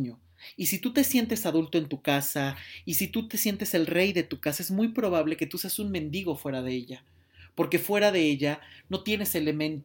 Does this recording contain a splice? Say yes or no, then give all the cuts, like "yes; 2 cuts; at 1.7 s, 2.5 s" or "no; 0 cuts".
no; 0 cuts